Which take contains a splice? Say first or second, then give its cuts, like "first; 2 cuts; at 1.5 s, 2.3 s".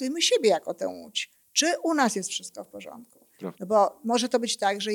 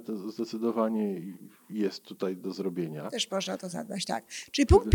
first; 1 cut; at 3.5 s